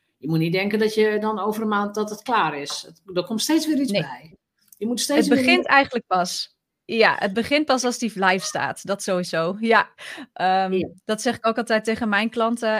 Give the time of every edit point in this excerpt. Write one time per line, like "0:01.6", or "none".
none